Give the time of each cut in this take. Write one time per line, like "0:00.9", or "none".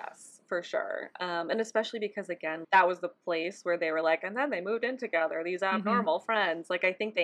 0:02.6